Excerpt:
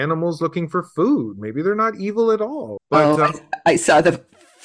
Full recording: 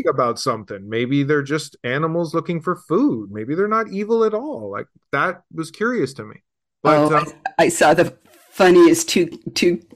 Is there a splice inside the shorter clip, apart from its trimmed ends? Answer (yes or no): yes